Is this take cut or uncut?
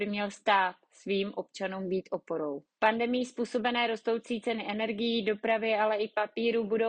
cut